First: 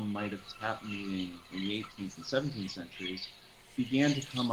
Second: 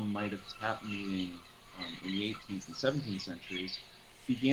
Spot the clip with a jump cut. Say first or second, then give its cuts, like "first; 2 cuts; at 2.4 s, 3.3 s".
first; 1 cut; at 1.5 s